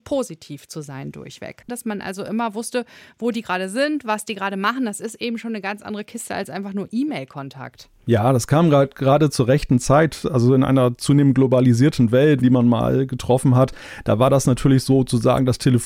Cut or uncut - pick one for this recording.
cut